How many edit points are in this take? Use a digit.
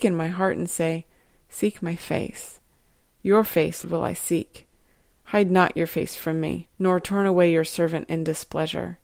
2